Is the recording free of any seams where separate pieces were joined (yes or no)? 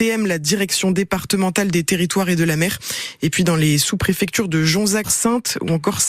no